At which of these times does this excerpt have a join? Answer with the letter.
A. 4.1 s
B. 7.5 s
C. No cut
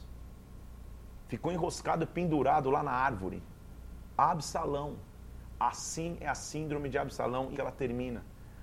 B